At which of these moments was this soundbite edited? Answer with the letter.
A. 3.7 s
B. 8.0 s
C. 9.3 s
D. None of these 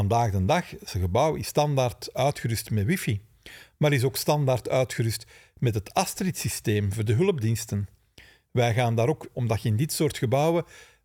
C